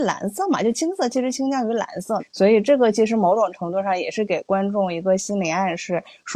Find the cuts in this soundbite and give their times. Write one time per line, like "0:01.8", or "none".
0:02.2

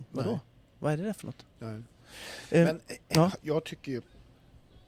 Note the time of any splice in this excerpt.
none

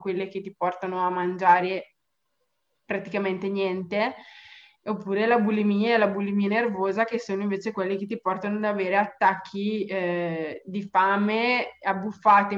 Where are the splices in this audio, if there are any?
none

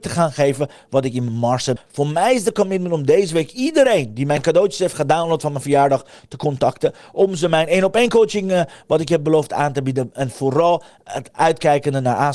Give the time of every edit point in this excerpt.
0:01.8

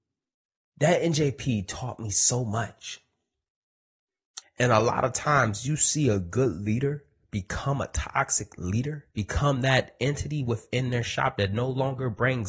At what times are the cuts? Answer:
0:04.4
0:09.1

